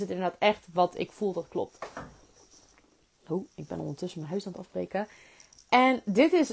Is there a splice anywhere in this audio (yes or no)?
no